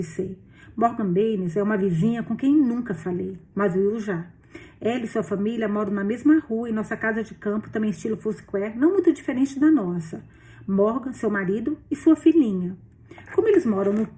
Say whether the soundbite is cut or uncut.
uncut